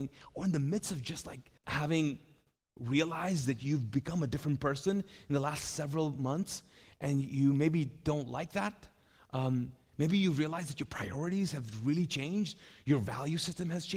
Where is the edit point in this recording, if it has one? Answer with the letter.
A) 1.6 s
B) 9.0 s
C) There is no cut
A